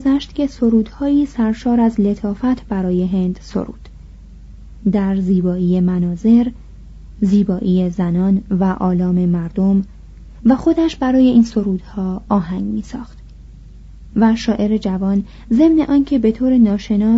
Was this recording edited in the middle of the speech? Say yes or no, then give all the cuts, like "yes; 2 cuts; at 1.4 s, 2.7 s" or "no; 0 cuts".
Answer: yes; 1 cut; at 14.1 s